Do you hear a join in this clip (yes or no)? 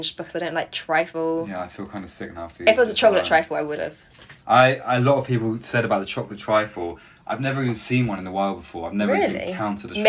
no